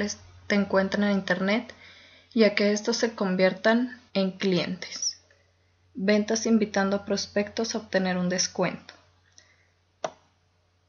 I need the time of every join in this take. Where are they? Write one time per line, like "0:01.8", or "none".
0:04.1
0:05.8